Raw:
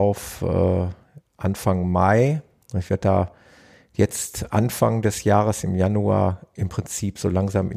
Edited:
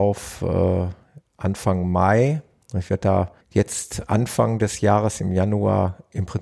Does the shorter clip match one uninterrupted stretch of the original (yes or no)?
no